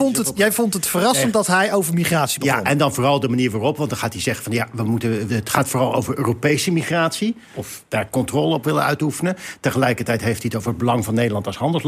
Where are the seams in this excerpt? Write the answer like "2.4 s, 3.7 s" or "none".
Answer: 5.3 s, 7.5 s